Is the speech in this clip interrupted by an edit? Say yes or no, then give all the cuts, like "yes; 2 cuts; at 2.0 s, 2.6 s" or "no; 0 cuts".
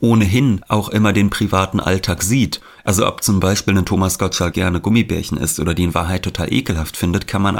yes; 1 cut; at 4.5 s